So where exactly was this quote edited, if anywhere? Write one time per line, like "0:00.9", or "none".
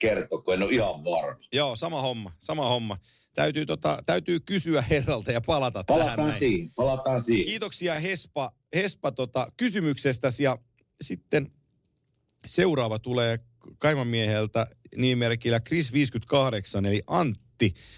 none